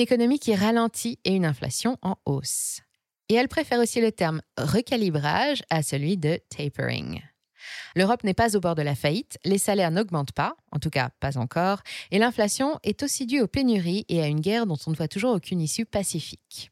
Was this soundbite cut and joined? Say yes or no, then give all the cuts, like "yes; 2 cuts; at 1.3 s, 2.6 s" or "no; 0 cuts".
yes; 1 cut; at 7.9 s